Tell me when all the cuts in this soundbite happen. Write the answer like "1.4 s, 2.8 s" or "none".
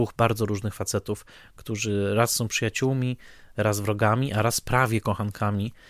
none